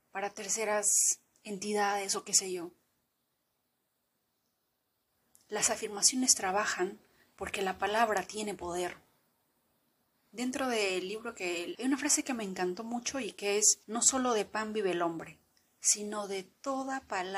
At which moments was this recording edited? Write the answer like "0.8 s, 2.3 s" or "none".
11.7 s, 13.8 s